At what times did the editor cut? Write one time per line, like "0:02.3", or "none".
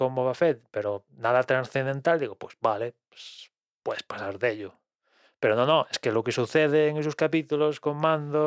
none